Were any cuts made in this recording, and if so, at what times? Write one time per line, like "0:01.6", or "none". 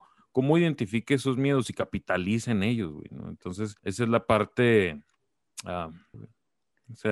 0:03.8
0:06.1